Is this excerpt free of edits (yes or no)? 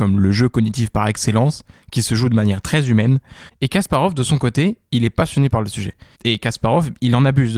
no